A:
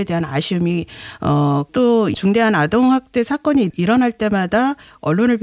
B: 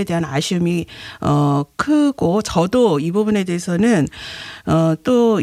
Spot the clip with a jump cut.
A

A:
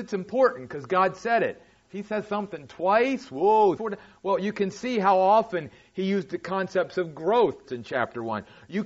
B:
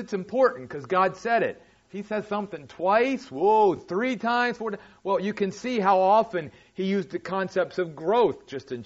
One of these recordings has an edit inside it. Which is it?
A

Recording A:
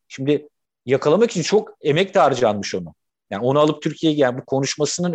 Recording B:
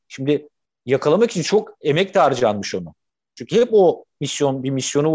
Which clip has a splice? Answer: B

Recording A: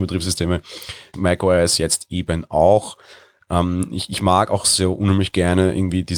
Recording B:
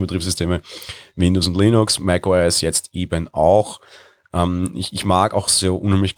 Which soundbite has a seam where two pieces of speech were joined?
A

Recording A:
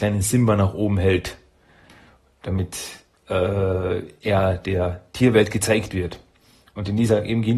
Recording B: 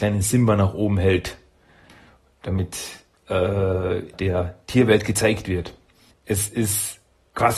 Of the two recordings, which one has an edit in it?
B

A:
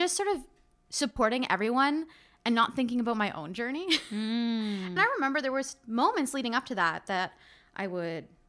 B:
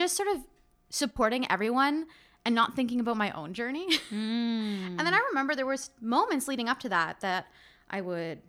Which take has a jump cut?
A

